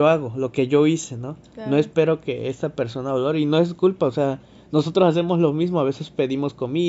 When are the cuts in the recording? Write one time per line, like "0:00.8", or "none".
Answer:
none

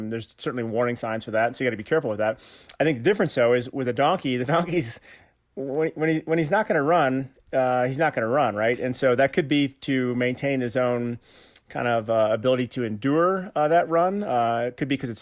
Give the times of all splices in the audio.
none

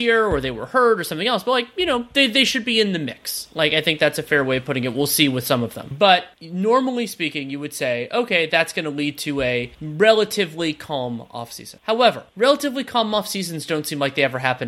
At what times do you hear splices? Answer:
none

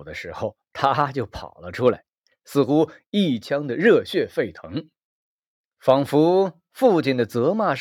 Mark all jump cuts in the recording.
none

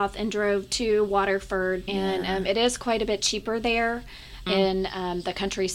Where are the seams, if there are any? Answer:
0:01.9
0:04.5

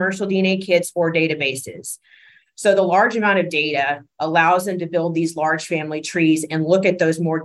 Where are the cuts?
0:02.4

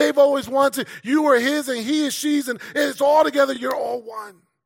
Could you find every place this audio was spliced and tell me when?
none

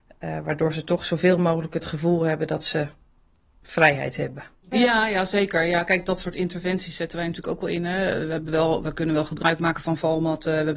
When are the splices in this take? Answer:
0:04.7

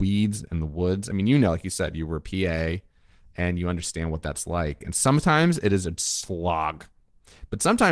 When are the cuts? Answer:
none

